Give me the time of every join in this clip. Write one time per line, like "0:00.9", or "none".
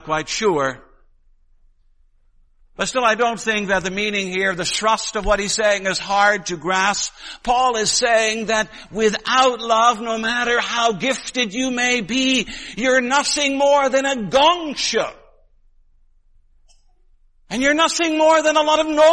none